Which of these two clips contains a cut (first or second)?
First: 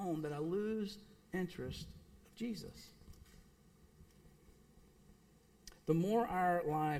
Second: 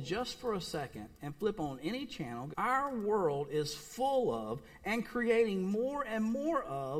second